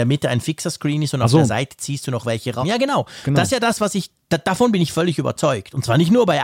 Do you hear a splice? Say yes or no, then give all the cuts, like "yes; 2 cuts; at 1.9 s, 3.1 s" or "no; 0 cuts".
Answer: yes; 1 cut; at 2.6 s